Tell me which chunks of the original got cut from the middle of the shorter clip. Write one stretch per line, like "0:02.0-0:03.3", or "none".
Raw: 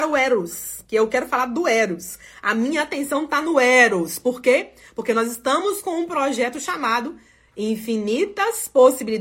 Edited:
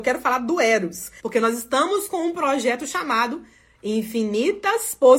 0:02.3-0:04.9